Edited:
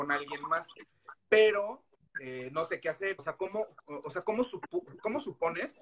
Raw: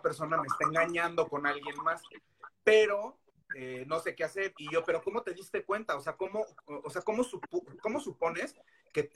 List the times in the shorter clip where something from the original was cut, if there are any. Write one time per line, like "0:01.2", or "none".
0:03.2

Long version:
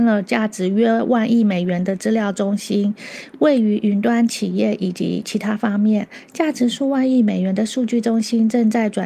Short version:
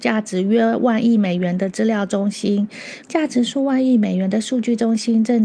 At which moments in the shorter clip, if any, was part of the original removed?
0:03.0

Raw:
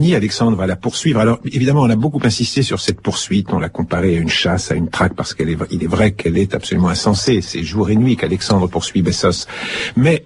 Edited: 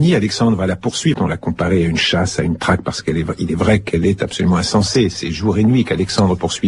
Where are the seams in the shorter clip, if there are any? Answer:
0:01.1

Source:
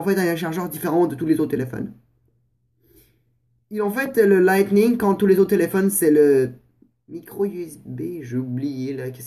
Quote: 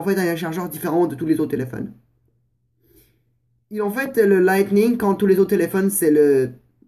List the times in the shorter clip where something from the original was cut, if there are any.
none

